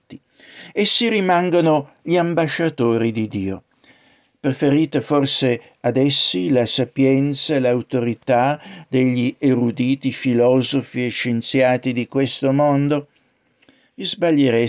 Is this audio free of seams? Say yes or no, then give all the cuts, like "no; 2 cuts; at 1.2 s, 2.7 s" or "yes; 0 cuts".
yes; 0 cuts